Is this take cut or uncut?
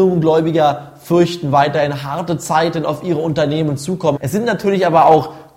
cut